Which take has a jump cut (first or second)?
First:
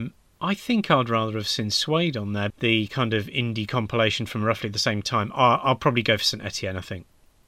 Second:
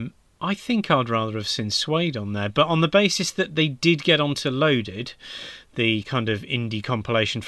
first